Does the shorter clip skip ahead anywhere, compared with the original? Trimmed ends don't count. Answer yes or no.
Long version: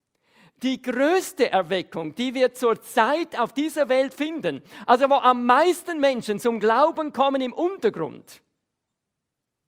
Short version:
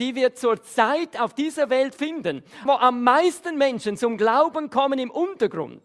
yes